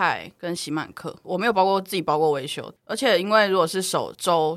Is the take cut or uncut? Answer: cut